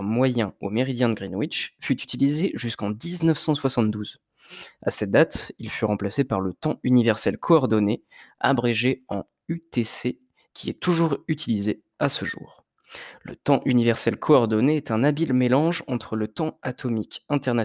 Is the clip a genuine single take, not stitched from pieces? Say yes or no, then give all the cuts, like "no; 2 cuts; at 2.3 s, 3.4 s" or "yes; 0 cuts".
yes; 0 cuts